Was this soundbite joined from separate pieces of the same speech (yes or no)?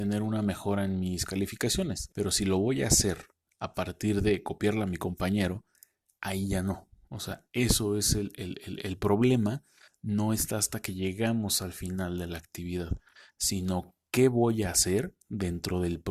yes